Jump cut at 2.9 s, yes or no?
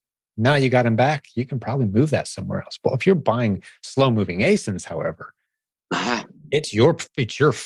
no